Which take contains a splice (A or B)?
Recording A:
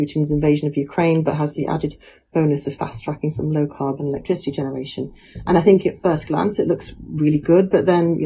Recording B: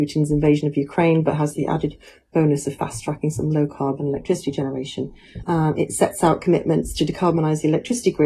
B